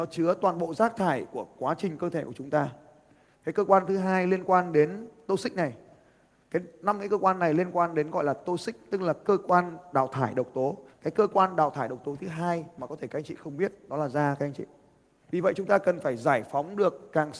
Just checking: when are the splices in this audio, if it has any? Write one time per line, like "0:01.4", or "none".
0:03.3
0:10.9
0:15.2